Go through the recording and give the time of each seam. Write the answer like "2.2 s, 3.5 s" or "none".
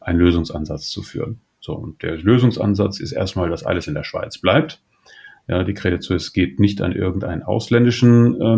none